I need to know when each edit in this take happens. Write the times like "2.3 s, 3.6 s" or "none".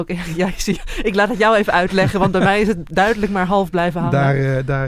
none